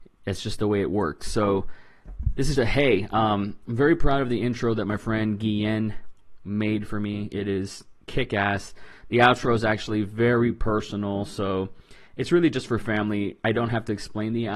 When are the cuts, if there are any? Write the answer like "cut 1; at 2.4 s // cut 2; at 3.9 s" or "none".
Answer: cut 1; at 2.5 s

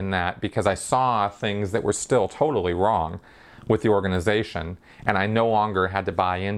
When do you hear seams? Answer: none

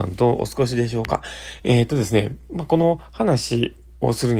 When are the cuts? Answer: cut 1; at 1.6 s

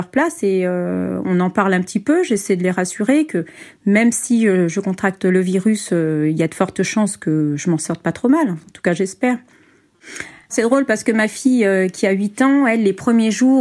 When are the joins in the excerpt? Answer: none

